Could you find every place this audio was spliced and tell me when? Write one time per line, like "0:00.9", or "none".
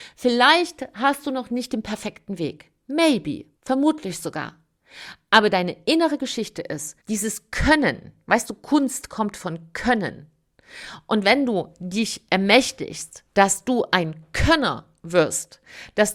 0:03.6
0:07.0